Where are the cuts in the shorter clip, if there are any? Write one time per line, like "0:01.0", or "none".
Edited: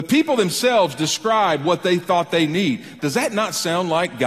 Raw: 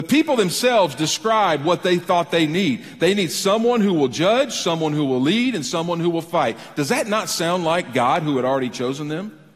0:03.0